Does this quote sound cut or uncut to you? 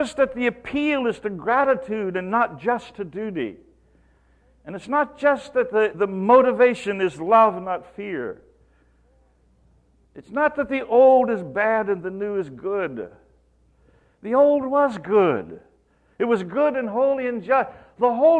uncut